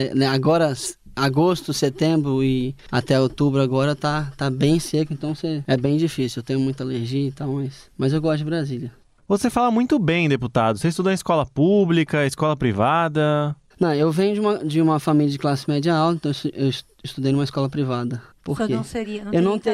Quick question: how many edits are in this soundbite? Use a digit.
1